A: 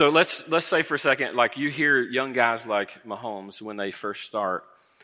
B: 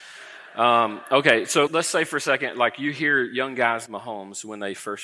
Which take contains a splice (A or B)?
B